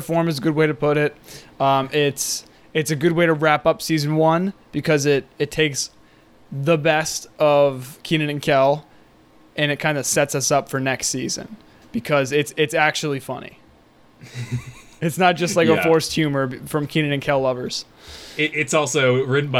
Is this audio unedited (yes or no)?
yes